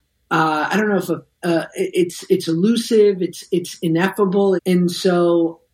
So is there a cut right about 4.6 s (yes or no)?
yes